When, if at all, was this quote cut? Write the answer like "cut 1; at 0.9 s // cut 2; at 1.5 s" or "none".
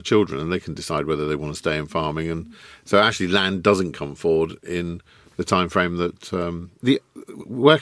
cut 1; at 6.8 s

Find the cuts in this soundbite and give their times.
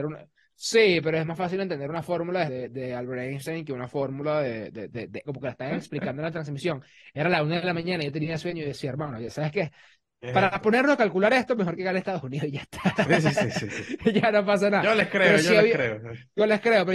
cut 1; at 2.5 s // cut 2; at 5.3 s

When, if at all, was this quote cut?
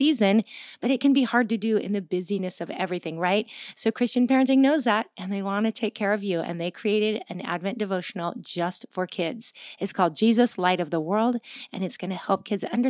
none

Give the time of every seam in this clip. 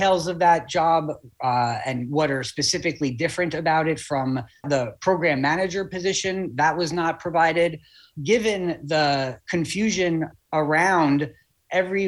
none

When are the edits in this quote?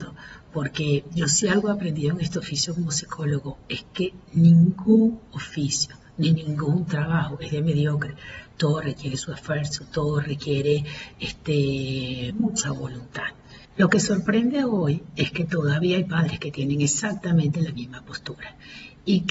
cut 1; at 12.3 s // cut 2; at 13.6 s

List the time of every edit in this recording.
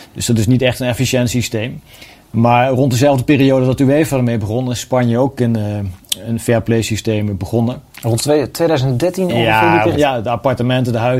cut 1; at 7.9 s // cut 2; at 9.9 s

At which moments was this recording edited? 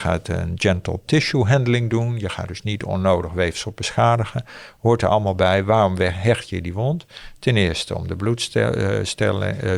none

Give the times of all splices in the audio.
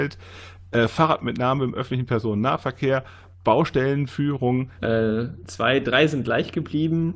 cut 1; at 4.8 s

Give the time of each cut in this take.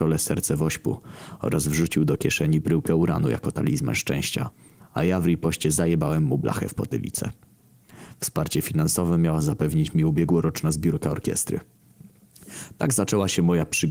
none

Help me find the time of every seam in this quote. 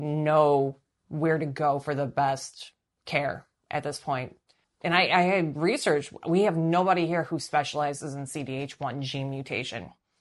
cut 1; at 4.6 s

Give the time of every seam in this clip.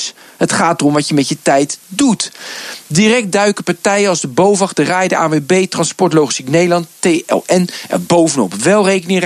none

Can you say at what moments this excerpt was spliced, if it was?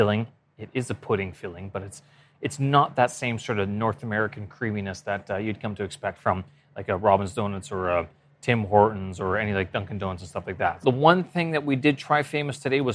cut 1; at 10.8 s

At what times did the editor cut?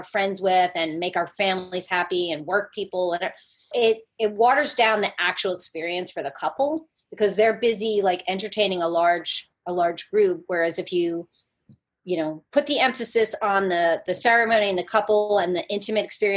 cut 1; at 3.7 s

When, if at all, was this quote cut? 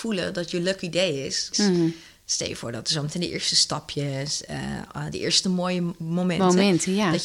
cut 1; at 1.5 s // cut 2; at 5.1 s

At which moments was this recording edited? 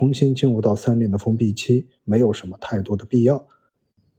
cut 1; at 2.0 s

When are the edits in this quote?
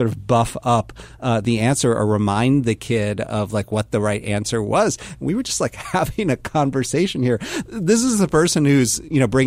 none

